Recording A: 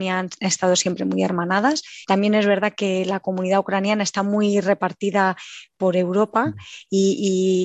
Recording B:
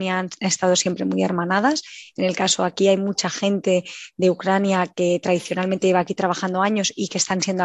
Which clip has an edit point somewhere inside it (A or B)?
A